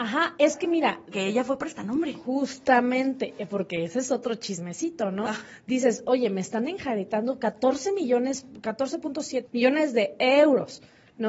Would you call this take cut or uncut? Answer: cut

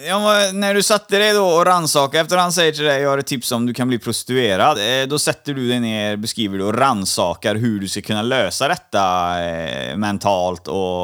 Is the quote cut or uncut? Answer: uncut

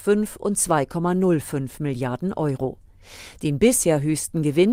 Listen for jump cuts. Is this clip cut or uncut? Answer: uncut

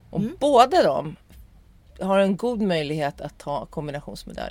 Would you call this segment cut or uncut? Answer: uncut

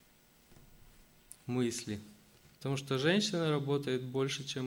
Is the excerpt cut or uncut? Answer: cut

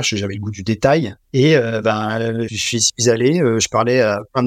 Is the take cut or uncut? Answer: cut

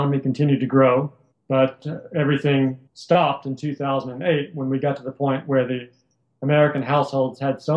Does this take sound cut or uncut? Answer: cut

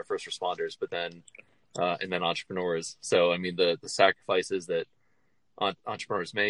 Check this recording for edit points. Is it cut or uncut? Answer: uncut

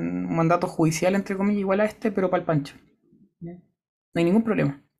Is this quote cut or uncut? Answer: uncut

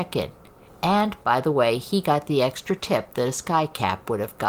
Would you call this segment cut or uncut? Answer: uncut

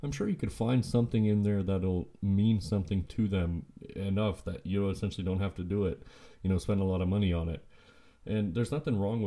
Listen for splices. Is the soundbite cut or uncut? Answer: uncut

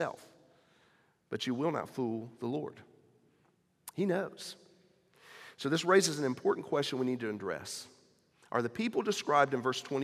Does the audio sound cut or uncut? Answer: uncut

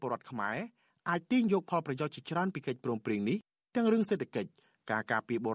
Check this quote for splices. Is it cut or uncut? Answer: uncut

